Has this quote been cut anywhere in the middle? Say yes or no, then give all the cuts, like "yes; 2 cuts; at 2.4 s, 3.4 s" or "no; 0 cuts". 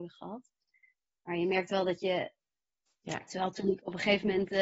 yes; 1 cut; at 2.9 s